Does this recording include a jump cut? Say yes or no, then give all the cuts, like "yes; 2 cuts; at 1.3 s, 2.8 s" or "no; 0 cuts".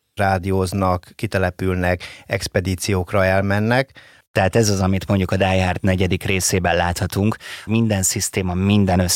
yes; 2 cuts; at 4.2 s, 7.7 s